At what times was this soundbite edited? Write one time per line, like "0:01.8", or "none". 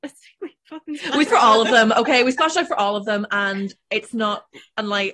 0:01.3